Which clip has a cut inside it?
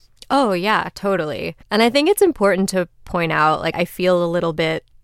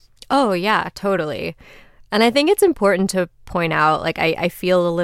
first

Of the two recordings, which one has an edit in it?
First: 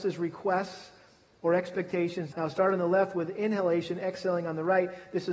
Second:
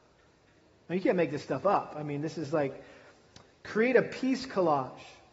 first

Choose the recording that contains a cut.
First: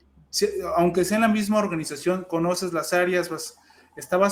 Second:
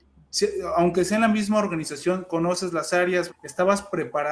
second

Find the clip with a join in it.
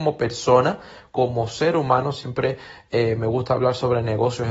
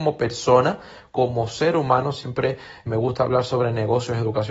second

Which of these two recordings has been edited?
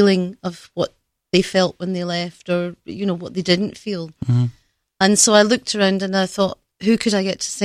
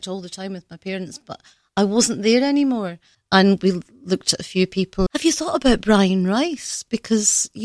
second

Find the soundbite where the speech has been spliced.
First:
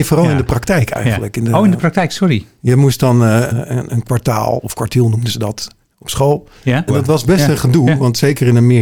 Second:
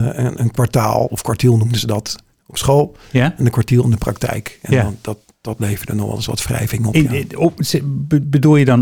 first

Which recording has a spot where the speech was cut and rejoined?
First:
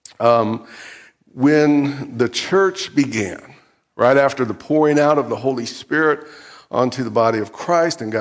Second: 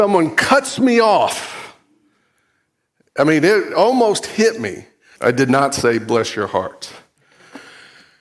second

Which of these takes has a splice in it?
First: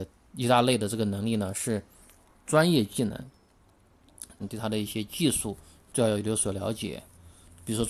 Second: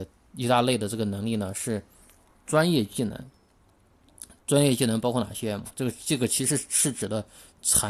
first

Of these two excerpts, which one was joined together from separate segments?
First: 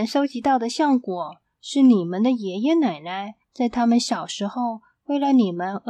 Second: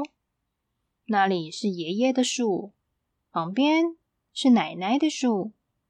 first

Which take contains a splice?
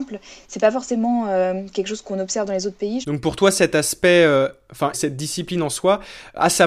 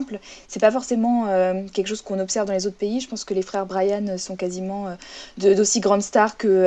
first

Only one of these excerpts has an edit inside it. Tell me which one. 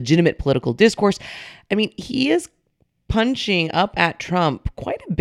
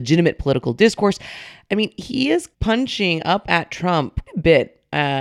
second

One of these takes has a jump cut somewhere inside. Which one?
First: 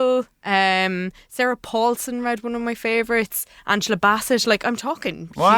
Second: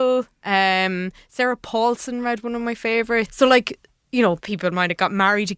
second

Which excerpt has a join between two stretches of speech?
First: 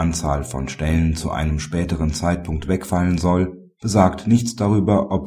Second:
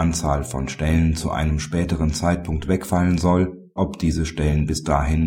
second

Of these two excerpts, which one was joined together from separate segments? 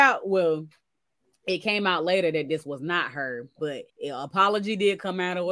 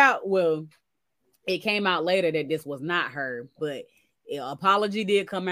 first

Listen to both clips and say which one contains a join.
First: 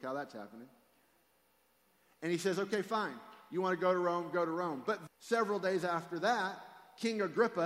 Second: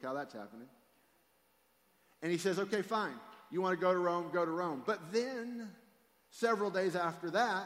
first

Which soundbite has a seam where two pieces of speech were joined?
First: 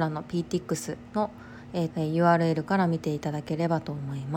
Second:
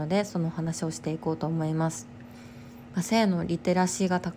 first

